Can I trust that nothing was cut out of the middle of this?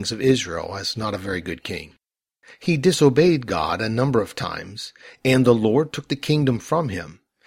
yes; 0 cuts

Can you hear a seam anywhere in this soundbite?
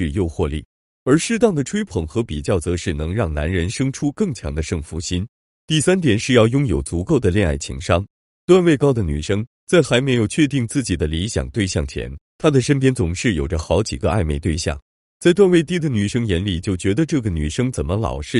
no; 0 cuts

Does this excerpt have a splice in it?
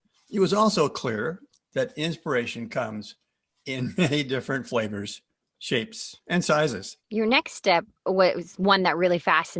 yes; 1 cut; at 7.0 s

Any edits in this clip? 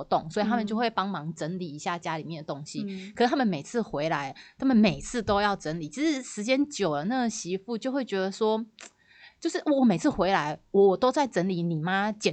no; 0 cuts

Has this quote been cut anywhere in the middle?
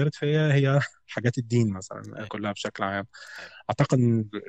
yes; 1 cut; at 2.3 s

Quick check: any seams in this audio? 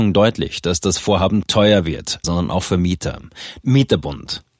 yes; 2 cuts; at 2.2 s, 3.6 s

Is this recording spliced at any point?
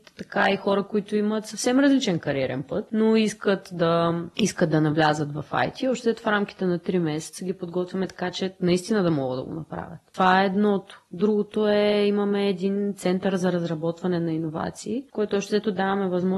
no; 0 cuts

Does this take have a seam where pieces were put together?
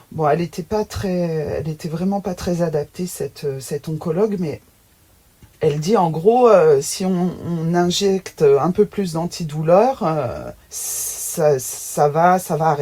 yes; 1 cut; at 10.6 s

